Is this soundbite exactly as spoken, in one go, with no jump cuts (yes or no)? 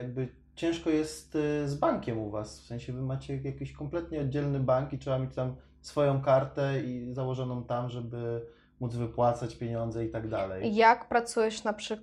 yes